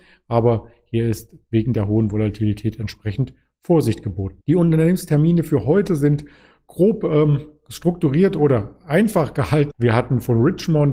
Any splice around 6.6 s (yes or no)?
no